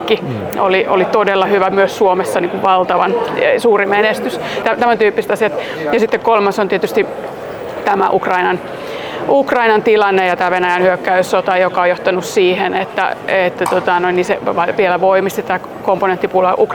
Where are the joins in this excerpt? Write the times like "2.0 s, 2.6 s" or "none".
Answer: 4.6 s

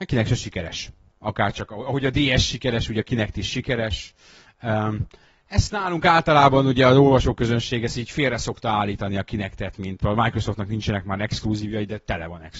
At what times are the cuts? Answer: 1.1 s, 10.0 s

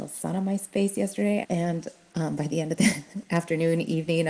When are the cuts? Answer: 1.4 s

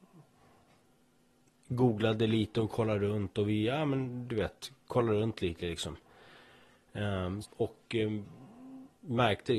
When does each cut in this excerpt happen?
7.4 s

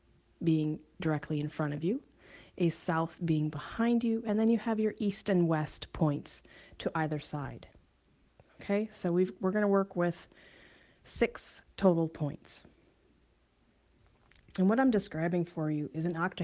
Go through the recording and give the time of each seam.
none

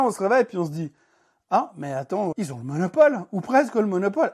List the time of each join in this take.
2.3 s

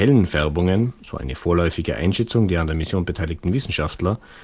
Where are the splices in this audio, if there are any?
none

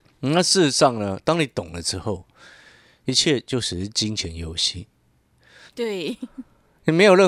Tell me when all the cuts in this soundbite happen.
5.7 s

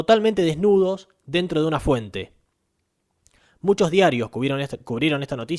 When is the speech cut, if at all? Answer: none

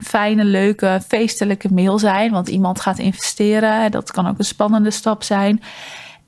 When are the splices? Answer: none

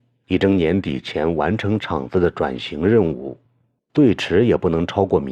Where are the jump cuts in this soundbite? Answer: none

